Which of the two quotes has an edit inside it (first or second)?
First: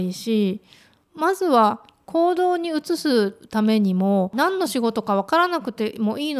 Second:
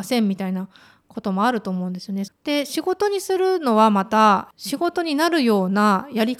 second